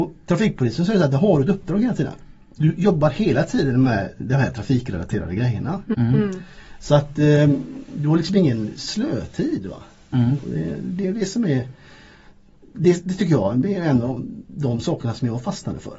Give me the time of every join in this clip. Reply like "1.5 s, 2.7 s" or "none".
5.9 s